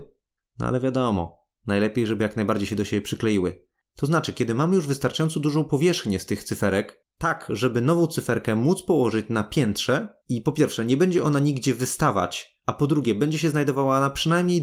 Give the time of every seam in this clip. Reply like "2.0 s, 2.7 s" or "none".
3.9 s